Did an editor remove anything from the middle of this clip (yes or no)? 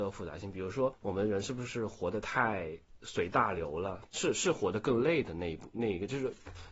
yes